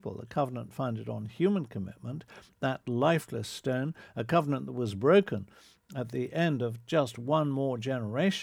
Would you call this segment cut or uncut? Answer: uncut